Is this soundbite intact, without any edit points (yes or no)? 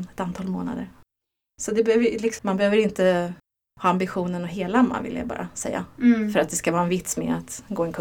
no